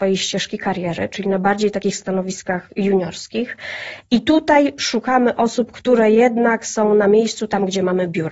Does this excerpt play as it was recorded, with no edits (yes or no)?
yes